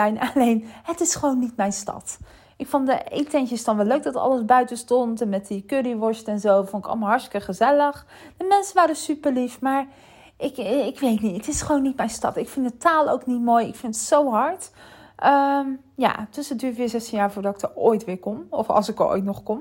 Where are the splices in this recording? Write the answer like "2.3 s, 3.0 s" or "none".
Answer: none